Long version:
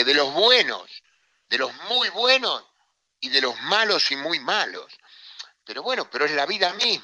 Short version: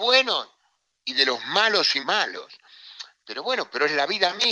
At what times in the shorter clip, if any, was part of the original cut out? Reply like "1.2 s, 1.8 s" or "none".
2.0 s